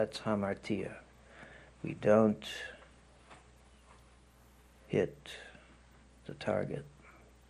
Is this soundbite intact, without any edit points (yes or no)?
no